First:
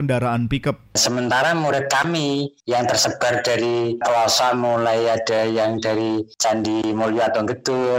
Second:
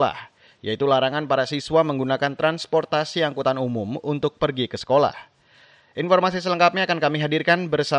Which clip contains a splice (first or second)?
first